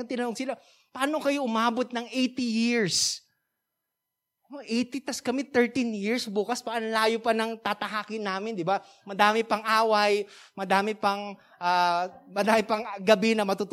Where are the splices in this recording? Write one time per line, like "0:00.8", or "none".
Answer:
none